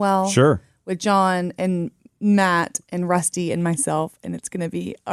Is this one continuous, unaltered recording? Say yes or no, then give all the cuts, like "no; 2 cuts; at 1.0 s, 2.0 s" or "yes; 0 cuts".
yes; 0 cuts